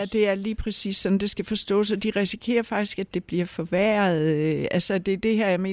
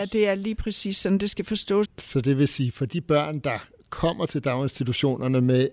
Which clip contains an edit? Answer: second; 1 cut; at 1.8 s

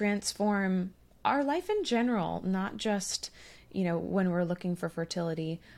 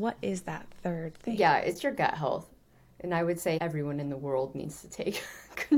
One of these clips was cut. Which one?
second; 1 cut; at 3.6 s

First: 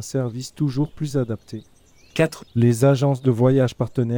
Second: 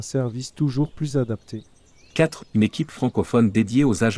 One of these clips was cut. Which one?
first; 1 cut; at 2.5 s

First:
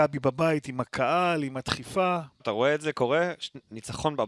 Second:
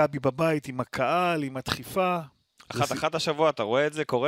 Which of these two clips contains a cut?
first; 1 cut; at 2.4 s

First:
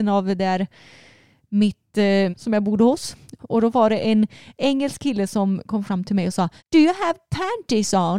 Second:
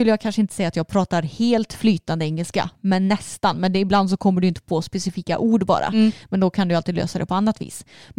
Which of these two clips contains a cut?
first; 3 cuts; at 2.3 s, 3.4 s, 6.6 s

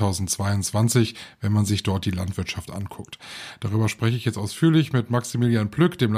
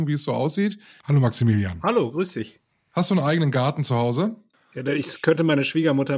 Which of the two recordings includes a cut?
second; 2 cuts; at 1.0 s, 4.5 s

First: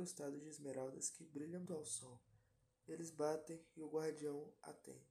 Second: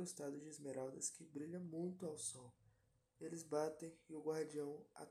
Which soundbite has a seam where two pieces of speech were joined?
first; 1 cut; at 1.7 s

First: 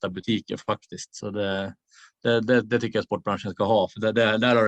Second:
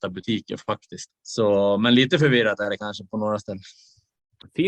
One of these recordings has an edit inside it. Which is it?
second; 1 cut; at 1.1 s

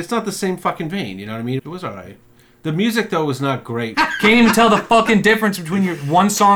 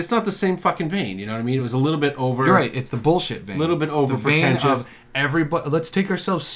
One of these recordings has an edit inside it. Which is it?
first; 2 cuts; at 1.6 s, 3.9 s

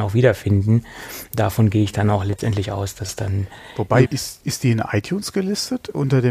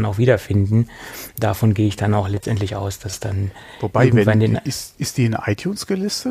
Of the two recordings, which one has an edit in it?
first; 1 cut; at 4.0 s

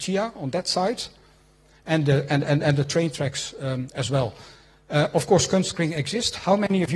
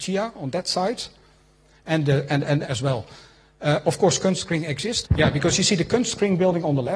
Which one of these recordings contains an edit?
second; 2 cuts; at 2.6 s, 5.0 s

